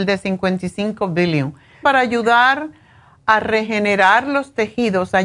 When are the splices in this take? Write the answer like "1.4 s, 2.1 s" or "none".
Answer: 1.8 s